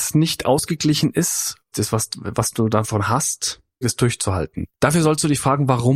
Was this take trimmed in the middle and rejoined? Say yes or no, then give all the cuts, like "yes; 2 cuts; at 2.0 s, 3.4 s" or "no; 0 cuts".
yes; 2 cuts; at 1.7 s, 3.8 s